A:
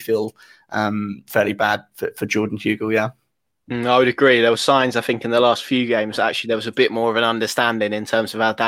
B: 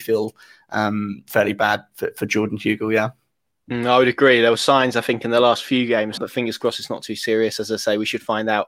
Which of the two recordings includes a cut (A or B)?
B